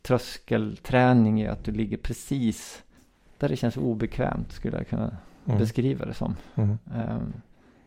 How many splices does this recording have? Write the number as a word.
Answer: zero